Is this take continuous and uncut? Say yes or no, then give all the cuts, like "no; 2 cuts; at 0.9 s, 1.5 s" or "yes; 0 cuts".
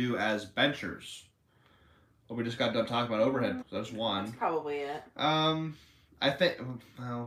no; 1 cut; at 3.6 s